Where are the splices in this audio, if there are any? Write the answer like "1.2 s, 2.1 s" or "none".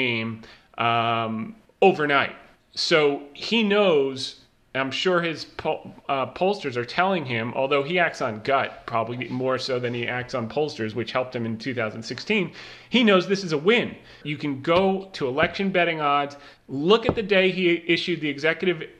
14.2 s, 16.6 s